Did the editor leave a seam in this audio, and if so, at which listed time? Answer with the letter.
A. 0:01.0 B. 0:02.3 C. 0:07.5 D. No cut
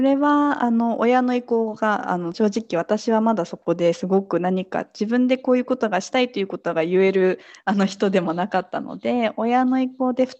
B